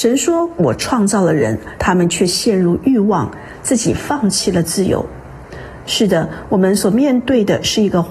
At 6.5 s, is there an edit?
no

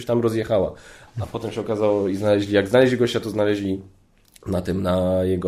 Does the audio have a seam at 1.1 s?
yes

